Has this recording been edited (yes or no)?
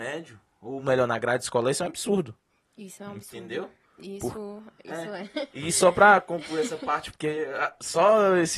no